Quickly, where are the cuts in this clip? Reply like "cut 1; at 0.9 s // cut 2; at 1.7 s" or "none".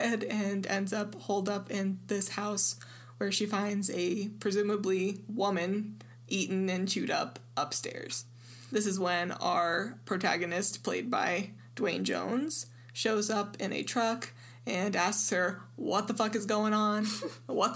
cut 1; at 8.7 s